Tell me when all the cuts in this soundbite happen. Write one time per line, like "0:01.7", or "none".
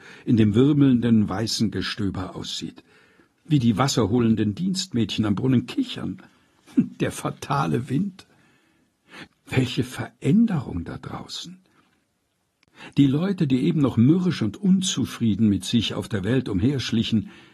0:09.3